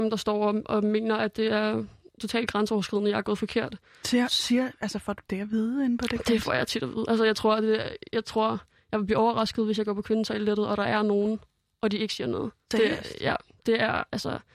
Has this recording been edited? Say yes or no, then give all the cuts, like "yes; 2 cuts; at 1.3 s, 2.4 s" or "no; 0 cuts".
no; 0 cuts